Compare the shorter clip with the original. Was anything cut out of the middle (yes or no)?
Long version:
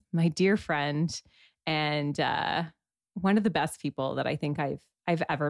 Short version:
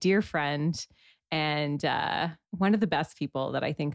yes